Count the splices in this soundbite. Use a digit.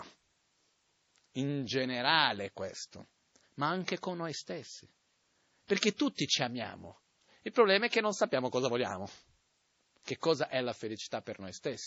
0